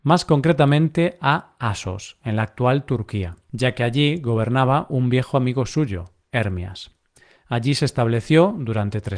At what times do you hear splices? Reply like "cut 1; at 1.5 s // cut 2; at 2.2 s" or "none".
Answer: none